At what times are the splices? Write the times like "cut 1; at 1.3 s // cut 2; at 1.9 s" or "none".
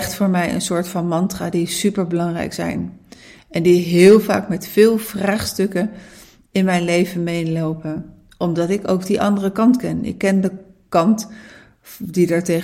none

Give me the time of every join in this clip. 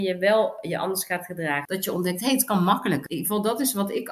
cut 1; at 1.7 s // cut 2; at 3.1 s

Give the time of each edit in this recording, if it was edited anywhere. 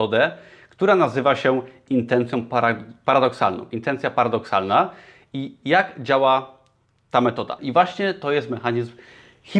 cut 1; at 7.6 s

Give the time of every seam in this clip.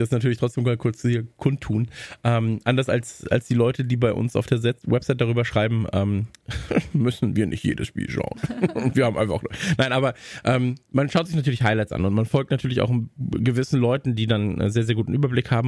none

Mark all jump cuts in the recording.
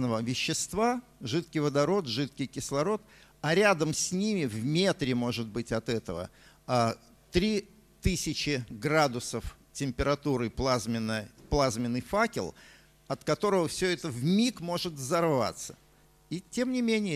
none

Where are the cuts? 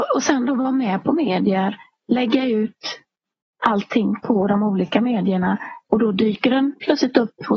cut 1; at 5.8 s

